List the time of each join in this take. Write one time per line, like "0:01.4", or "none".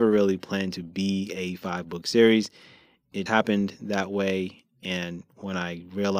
0:03.3